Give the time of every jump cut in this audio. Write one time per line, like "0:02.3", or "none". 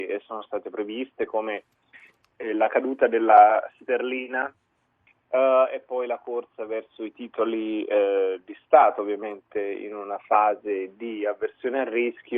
none